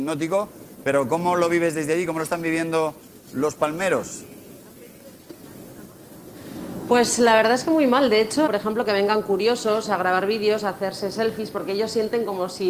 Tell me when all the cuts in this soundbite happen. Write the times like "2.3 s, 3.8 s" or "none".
8.5 s